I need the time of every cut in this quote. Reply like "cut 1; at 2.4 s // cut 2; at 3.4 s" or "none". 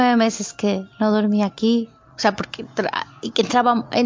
none

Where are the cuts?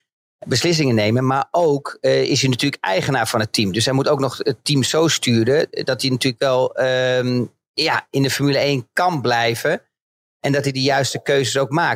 none

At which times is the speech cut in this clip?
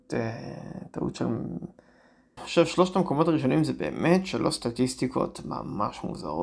cut 1; at 2.4 s

